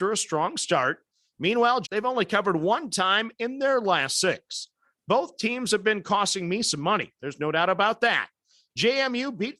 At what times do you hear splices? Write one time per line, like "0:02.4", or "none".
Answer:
0:01.8

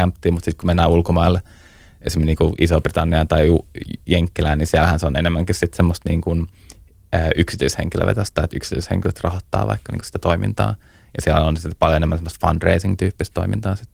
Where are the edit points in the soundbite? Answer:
none

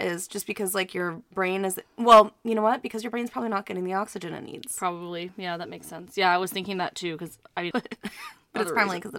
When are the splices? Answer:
0:07.7

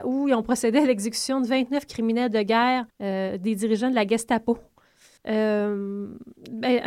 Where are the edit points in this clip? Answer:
0:02.9
0:05.2

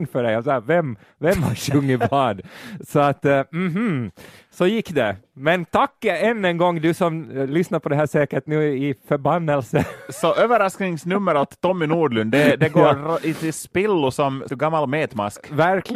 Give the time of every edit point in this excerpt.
0:14.5

